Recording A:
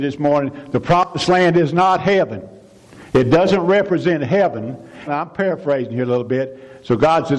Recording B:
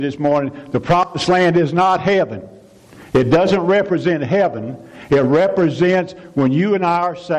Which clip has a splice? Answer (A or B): A